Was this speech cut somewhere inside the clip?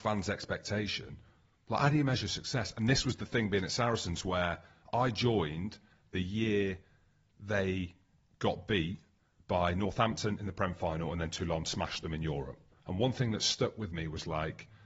yes; 1 cut; at 12.8 s

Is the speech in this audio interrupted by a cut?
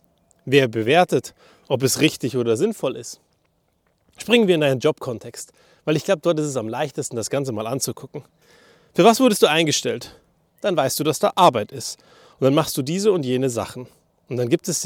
yes; 1 cut; at 10.5 s

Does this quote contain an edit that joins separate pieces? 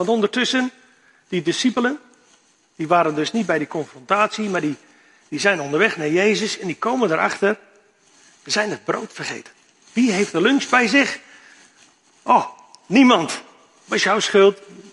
no; 0 cuts

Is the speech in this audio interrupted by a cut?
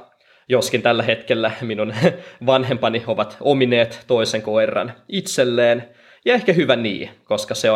no; 0 cuts

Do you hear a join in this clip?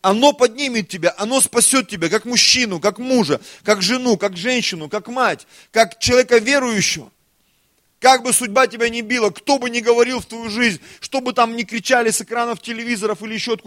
no; 0 cuts

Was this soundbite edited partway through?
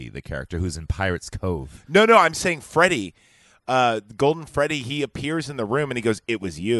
no; 0 cuts

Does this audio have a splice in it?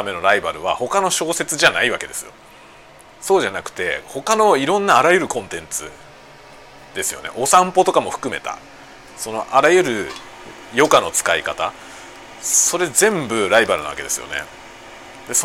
no; 0 cuts

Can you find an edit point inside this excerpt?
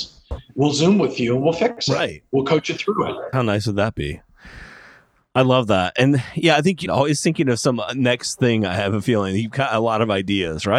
yes; 1 cut; at 6.9 s

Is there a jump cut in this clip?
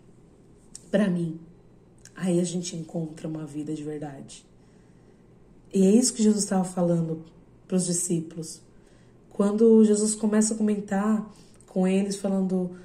no; 0 cuts

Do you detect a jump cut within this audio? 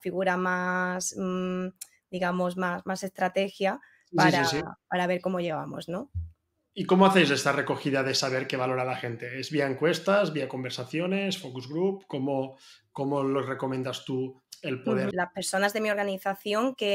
yes; 1 cut; at 15.1 s

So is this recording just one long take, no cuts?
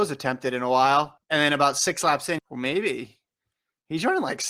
no; 2 cuts; at 1.2 s, 2.4 s

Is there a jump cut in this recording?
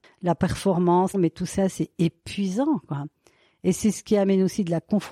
yes; 1 cut; at 1.1 s

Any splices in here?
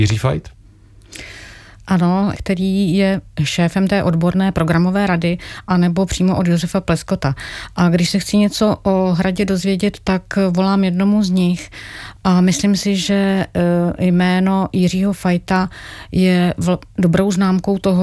yes; 1 cut; at 2.3 s

